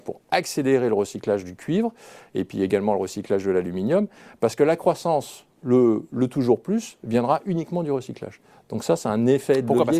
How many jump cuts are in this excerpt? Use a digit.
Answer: 0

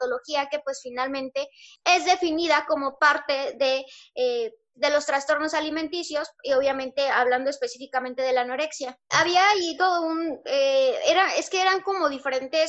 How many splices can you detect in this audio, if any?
2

